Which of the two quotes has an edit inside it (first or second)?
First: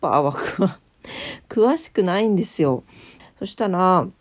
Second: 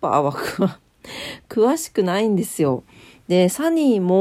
first